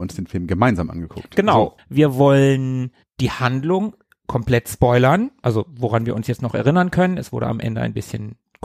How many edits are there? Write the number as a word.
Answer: one